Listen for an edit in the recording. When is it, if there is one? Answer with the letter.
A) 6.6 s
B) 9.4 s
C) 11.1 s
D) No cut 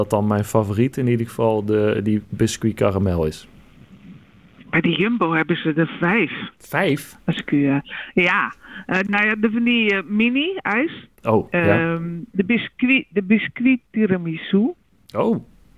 A